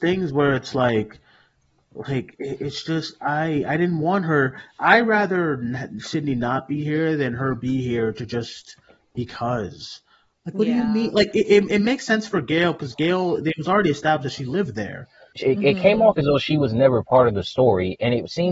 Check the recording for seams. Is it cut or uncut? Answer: cut